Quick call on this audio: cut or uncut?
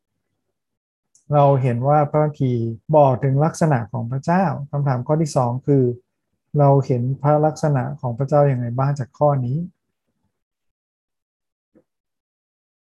cut